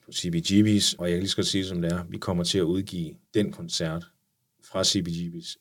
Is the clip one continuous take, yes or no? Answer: no